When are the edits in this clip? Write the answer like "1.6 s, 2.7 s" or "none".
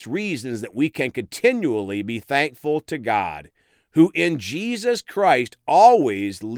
none